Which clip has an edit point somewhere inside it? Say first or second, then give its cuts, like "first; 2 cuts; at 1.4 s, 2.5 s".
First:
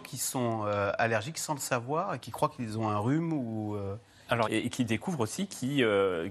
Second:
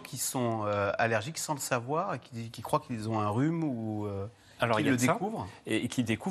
first; 2 cuts; at 2.2 s, 4.4 s